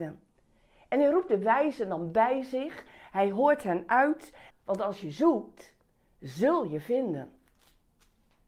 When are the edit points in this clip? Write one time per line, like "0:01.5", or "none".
0:04.5